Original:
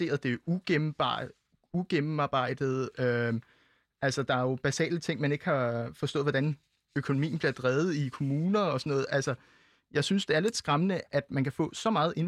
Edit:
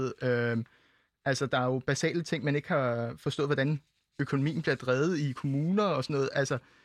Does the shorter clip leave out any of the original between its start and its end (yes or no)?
no